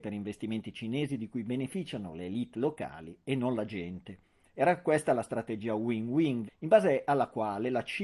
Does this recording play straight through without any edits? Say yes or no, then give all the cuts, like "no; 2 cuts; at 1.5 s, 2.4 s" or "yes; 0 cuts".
no; 2 cuts; at 4.4 s, 6.5 s